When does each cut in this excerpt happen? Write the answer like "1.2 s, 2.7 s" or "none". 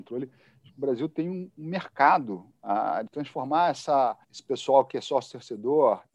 3.1 s, 4.2 s